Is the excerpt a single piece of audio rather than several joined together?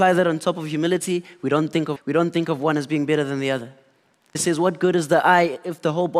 no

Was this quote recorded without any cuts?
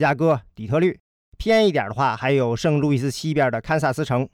yes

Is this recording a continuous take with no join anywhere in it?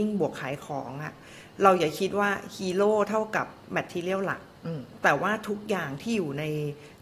yes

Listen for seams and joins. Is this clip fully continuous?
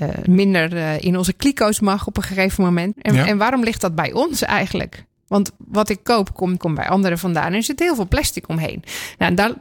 no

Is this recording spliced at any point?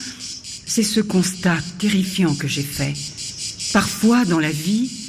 no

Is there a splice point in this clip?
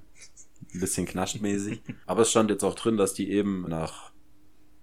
yes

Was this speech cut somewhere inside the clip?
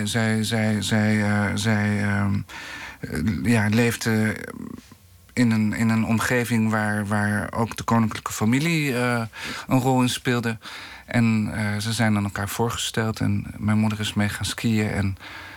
no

